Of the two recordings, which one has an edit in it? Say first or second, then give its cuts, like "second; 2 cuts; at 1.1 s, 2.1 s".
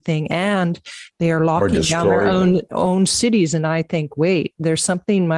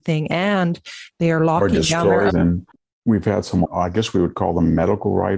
second; 2 cuts; at 2.3 s, 3.6 s